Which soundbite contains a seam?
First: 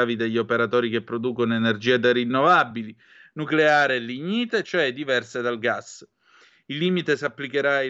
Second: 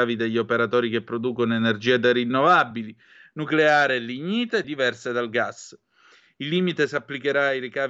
second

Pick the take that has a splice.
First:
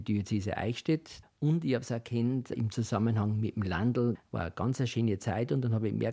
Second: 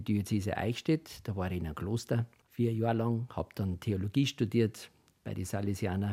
first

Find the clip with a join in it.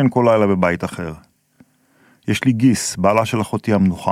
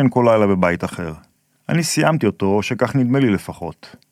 second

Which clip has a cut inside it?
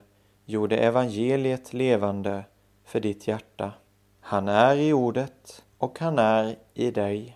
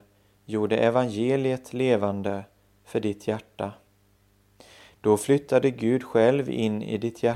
first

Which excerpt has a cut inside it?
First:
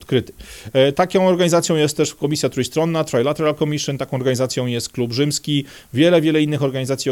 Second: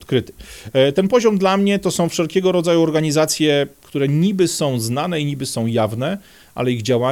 first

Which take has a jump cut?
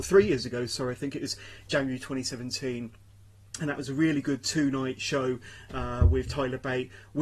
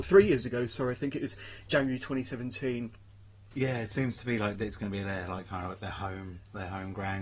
second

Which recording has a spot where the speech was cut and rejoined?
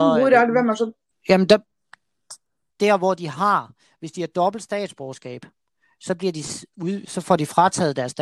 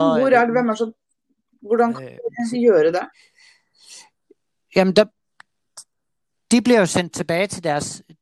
first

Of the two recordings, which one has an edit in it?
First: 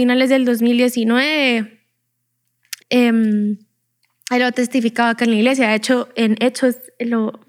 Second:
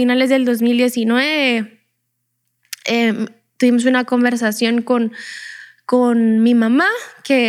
first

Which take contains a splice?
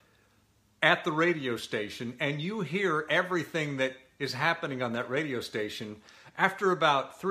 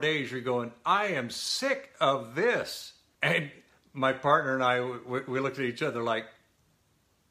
second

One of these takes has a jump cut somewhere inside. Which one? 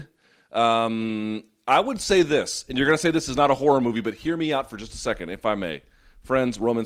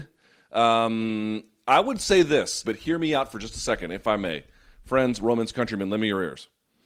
second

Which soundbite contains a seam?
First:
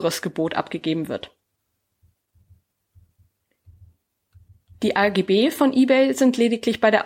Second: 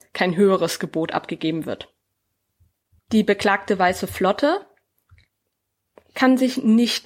second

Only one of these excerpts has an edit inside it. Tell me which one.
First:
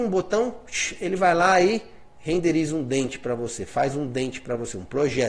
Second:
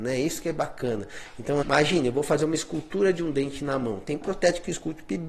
second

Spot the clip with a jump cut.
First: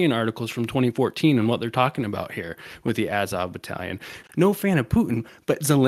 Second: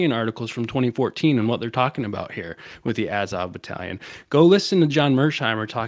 first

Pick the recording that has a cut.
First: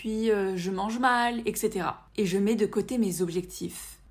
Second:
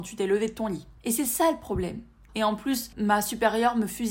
second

